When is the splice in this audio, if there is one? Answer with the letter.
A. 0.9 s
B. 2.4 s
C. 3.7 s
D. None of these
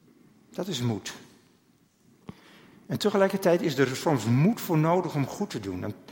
D